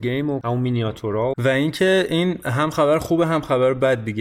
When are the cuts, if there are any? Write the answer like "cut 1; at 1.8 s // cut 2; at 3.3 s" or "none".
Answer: cut 1; at 1.3 s